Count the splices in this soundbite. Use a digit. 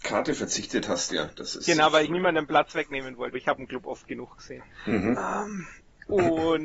1